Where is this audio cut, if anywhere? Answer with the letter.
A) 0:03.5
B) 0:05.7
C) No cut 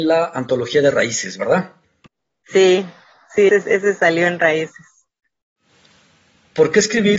A